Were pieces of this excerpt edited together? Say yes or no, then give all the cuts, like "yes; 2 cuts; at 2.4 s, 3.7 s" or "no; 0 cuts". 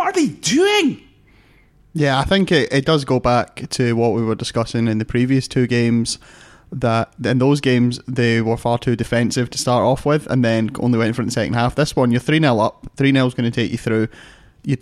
no; 0 cuts